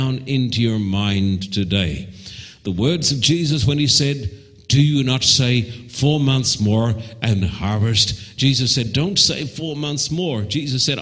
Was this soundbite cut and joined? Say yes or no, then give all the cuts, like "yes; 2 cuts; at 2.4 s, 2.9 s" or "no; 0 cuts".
yes; 1 cut; at 7.4 s